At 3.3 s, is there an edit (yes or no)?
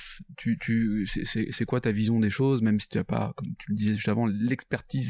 no